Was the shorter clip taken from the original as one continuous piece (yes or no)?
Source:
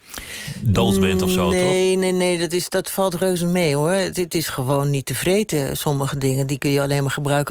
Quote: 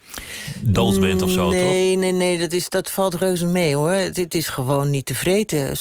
yes